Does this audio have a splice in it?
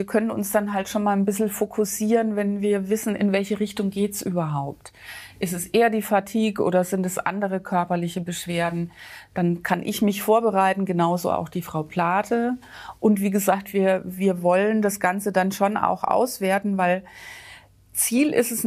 no; 0 cuts

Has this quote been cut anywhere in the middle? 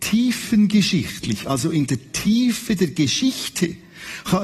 no; 0 cuts

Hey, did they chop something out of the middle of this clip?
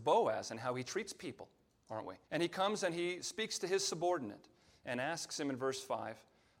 yes; 1 cut; at 2.2 s

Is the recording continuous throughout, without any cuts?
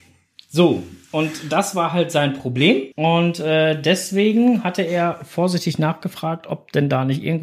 no; 1 cut; at 2.9 s

